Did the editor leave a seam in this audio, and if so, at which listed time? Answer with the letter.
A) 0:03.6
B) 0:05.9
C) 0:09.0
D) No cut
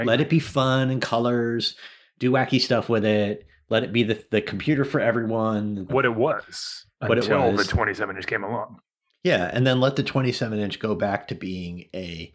B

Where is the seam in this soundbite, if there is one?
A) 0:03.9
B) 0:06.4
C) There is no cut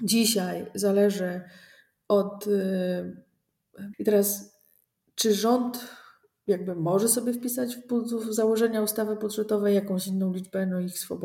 A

